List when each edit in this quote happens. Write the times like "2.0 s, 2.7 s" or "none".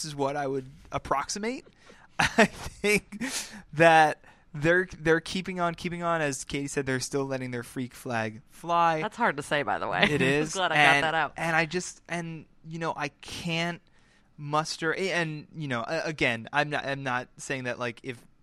none